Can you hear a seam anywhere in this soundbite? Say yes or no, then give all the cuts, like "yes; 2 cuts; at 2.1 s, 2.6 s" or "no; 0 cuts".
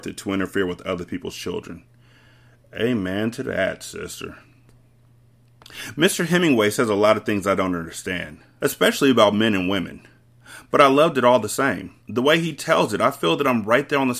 yes; 2 cuts; at 8.6 s, 12.0 s